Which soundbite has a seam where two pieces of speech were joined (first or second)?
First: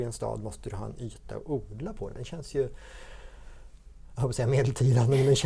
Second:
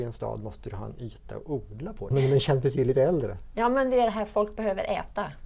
second